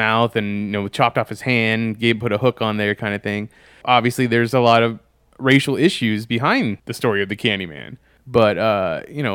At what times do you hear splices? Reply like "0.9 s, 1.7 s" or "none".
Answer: 3.8 s, 6.8 s, 8.2 s